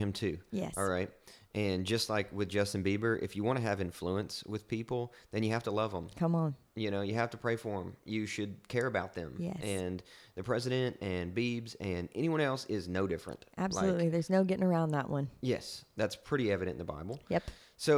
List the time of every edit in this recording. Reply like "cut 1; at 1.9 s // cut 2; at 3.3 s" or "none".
none